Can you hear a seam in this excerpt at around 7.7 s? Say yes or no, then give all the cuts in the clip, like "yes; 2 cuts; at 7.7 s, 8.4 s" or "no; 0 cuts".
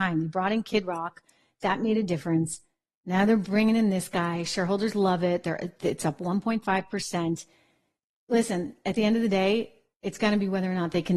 no; 0 cuts